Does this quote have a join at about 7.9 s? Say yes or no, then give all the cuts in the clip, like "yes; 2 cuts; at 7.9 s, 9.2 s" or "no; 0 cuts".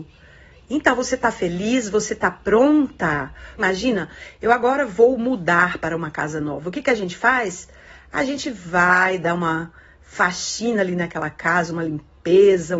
no; 1 cut; at 3.6 s